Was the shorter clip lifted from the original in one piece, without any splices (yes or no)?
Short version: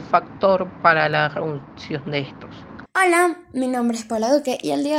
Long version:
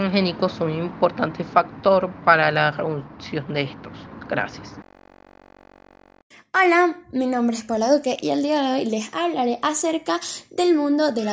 no